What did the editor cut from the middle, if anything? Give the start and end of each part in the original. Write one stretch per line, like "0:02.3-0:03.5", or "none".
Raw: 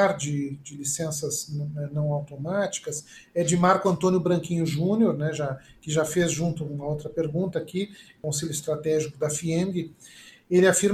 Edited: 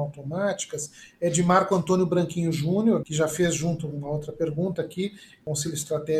0:05.2-0:05.8